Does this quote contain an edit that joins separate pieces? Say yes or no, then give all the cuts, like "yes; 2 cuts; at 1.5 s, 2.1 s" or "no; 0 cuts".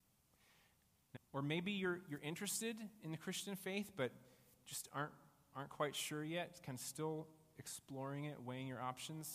yes; 1 cut; at 1.2 s